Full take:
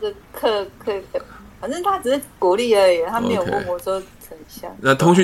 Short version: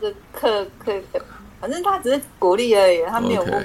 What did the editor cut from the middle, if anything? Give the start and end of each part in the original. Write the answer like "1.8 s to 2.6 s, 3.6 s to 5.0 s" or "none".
none